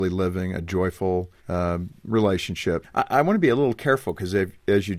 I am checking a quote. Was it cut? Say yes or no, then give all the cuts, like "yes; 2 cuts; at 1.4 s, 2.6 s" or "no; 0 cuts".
yes; 2 cuts; at 1.4 s, 2.8 s